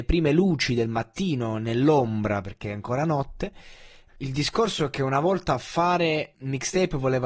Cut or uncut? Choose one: cut